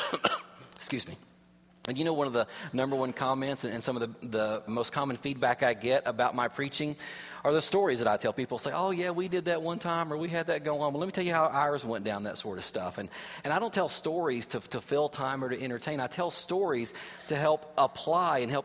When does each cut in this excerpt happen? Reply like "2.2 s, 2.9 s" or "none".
4.7 s